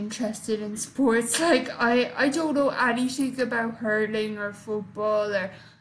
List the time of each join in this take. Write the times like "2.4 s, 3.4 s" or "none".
none